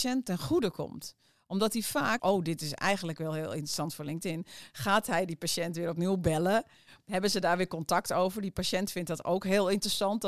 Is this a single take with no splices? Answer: no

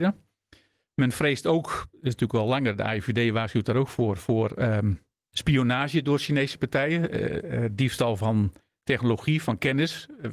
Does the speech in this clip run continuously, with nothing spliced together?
yes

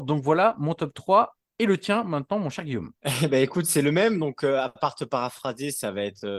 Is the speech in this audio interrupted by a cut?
yes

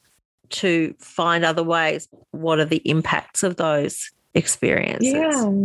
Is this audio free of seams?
yes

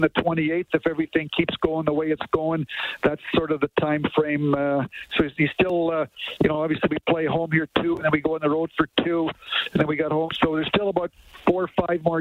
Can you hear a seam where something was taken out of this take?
no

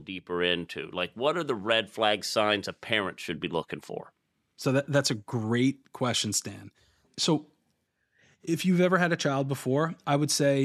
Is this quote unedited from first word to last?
yes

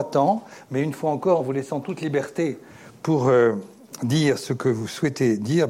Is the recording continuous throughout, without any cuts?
yes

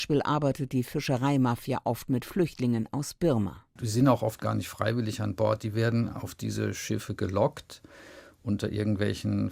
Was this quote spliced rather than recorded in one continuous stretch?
no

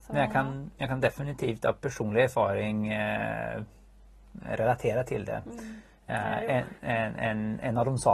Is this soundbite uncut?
yes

